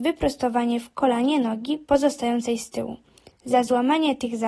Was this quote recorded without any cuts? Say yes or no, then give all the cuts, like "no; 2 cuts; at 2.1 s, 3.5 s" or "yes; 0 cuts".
yes; 0 cuts